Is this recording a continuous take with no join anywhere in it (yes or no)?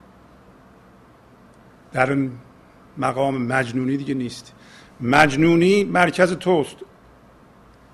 yes